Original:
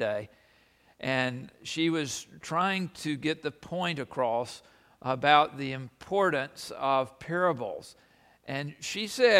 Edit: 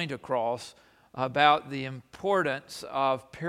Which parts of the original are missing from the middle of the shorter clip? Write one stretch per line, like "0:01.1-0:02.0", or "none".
none